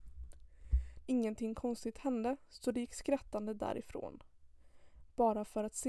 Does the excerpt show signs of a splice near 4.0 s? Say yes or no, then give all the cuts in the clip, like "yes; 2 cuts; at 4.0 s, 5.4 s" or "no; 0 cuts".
no; 1 cut; at 1.0 s